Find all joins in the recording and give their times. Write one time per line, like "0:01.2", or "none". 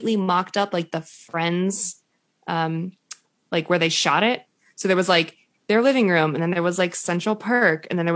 none

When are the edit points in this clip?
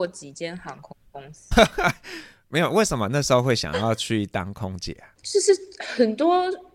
0:01.5

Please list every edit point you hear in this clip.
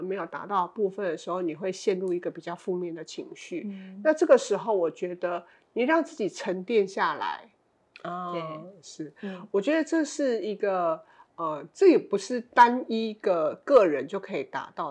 0:07.9

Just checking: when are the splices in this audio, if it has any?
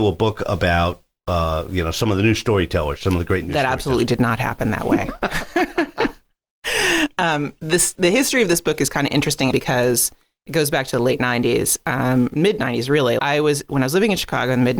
0:09.5
0:13.2

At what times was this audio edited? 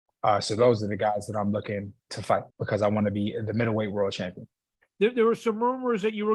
0:02.5

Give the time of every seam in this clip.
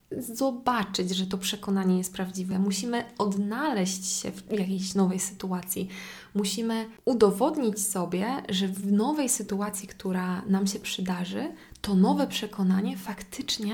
none

